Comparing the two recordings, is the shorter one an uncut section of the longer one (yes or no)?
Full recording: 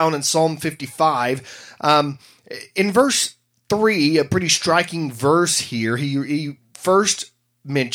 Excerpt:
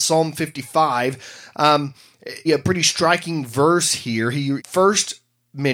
no